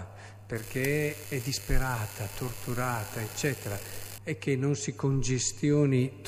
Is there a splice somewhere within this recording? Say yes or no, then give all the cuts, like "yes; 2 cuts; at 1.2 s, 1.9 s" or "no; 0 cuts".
yes; 2 cuts; at 1.2 s, 4.2 s